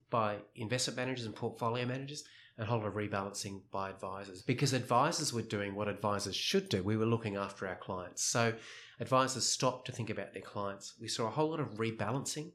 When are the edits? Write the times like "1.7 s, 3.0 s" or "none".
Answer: 4.4 s